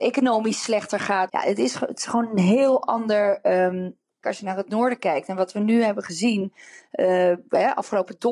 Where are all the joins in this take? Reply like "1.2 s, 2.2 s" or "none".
1.3 s, 4.2 s